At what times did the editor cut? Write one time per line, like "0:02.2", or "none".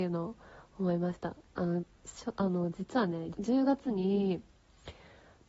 0:03.3